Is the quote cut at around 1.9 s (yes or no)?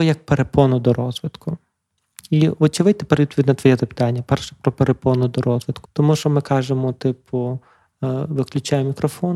no